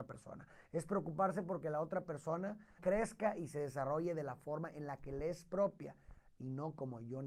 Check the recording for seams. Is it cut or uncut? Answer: cut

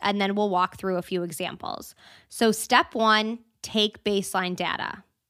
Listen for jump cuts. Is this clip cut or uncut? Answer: uncut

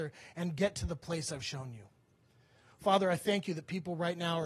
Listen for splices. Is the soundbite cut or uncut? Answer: uncut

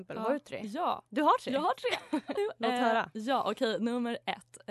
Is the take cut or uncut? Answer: cut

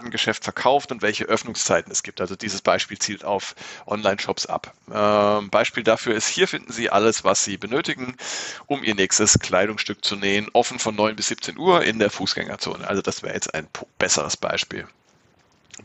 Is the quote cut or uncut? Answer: uncut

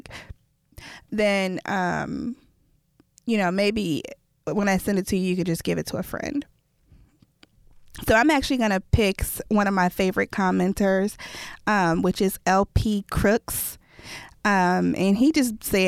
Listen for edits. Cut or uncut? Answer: uncut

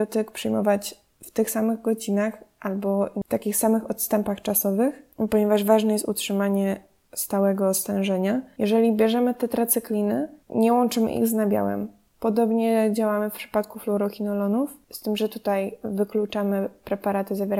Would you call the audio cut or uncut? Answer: uncut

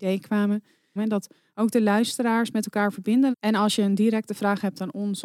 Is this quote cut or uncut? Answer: cut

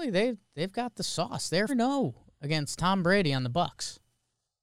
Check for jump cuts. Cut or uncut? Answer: cut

